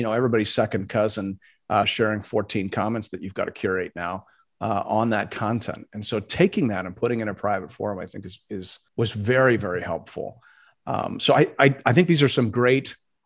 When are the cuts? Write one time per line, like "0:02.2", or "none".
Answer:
0:01.8
0:08.9